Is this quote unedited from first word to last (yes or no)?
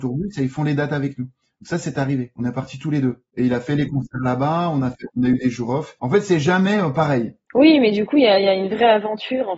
no